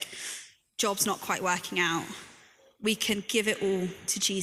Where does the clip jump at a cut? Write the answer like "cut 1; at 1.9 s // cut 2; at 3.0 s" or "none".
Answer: none